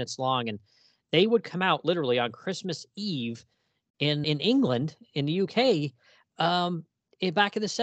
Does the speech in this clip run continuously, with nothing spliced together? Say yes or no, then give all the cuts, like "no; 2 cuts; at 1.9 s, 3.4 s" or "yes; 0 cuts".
no; 1 cut; at 4.2 s